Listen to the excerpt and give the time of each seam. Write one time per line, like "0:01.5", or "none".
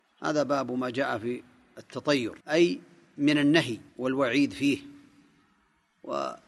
0:02.4
0:03.9